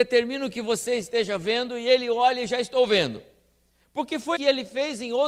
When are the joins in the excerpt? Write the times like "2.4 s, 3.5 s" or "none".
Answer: 4.4 s